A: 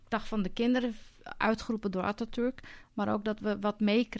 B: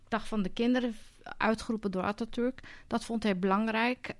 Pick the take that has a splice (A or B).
A